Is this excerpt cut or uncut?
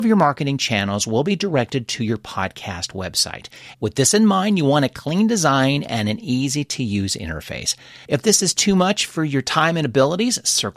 cut